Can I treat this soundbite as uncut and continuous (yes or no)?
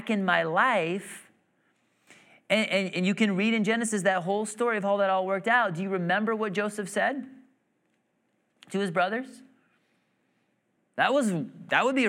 no